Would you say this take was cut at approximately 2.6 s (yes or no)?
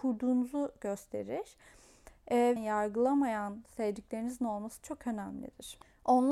yes